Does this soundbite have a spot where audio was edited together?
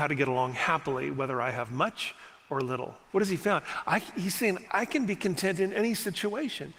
yes; 2 cuts; at 3.1 s, 4.7 s

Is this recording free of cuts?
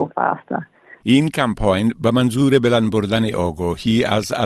no; 1 cut; at 1.0 s

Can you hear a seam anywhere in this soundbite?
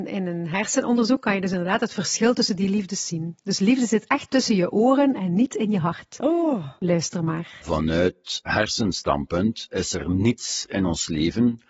no; 0 cuts

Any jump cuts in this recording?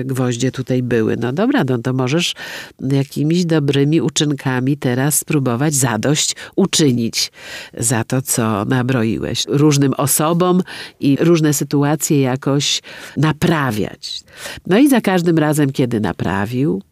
yes; 1 cut; at 9.4 s

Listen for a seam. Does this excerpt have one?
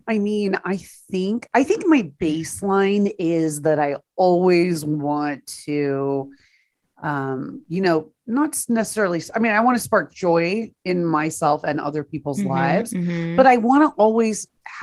no; 0 cuts

